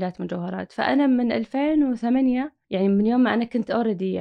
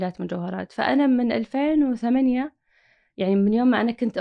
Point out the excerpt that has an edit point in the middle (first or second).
first